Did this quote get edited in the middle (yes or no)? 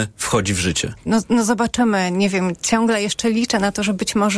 yes